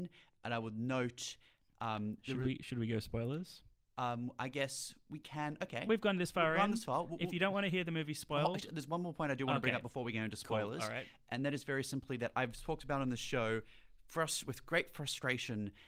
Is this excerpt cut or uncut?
uncut